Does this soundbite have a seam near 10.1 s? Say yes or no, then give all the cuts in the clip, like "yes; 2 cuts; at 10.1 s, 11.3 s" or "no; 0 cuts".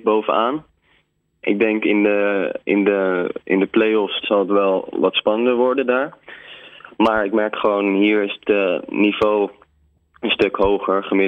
no; 1 cut; at 4.2 s